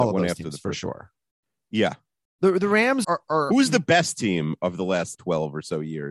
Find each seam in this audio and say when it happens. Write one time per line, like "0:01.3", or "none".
0:03.0
0:05.1